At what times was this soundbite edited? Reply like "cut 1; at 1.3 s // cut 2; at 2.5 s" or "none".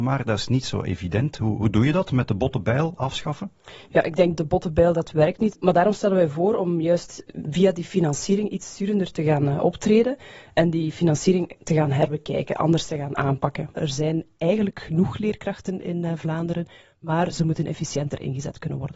cut 1; at 4.3 s // cut 2; at 13.7 s